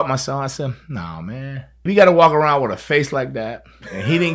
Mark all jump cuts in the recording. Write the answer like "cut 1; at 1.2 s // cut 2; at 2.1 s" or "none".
cut 1; at 1.9 s